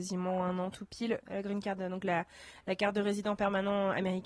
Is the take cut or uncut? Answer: cut